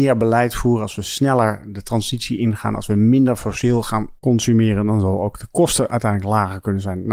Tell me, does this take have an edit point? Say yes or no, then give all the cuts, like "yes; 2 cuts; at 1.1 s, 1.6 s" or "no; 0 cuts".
no; 0 cuts